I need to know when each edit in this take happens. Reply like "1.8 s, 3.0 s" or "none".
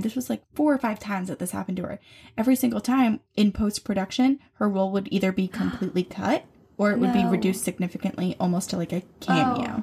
none